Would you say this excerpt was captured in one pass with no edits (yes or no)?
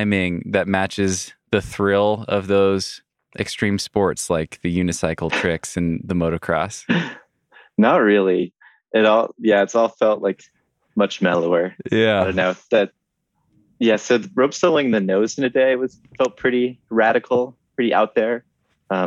yes